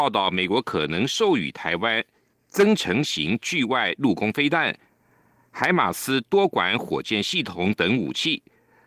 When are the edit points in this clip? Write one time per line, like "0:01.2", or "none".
none